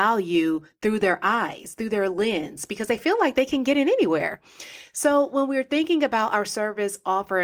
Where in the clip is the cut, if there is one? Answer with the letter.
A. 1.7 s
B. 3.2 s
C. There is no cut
C